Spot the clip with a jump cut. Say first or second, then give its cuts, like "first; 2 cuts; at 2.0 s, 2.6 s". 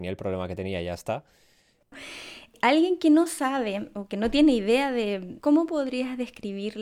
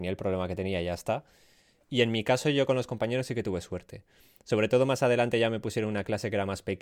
first; 2 cuts; at 1.8 s, 5.4 s